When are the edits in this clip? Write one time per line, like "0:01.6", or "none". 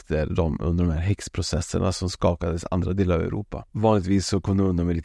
0:03.7